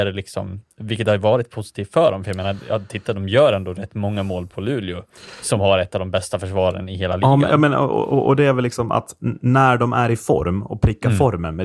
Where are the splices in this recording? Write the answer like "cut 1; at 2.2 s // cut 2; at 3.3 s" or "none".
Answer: none